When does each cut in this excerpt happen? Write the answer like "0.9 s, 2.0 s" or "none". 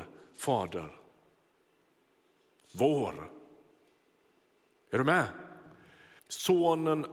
6.2 s